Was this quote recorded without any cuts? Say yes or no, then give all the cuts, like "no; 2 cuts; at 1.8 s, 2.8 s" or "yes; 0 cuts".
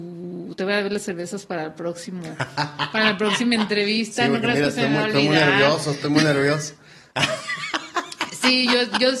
yes; 0 cuts